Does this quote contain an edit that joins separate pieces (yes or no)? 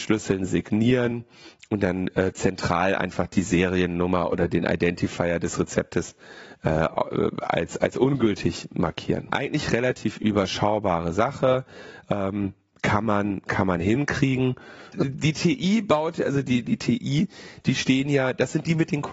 yes